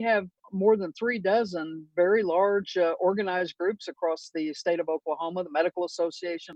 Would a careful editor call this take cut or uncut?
uncut